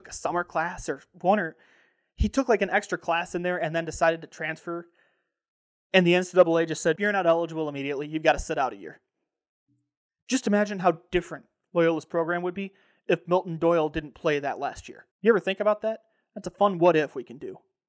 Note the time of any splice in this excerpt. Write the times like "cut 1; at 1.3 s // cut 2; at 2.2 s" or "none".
cut 1; at 7.0 s // cut 2; at 15.1 s